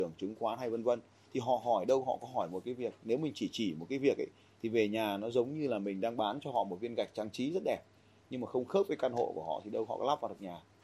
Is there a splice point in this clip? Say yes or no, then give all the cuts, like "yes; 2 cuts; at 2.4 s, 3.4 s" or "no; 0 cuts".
no; 0 cuts